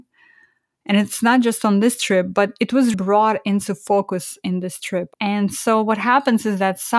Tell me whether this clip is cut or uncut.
cut